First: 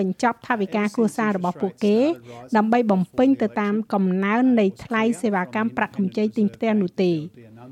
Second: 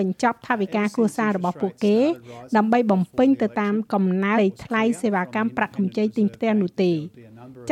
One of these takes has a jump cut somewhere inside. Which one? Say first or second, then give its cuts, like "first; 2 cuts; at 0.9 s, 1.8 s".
second; 1 cut; at 4.4 s